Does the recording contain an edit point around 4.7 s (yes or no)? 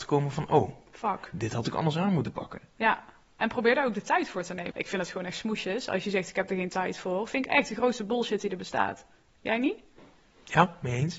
yes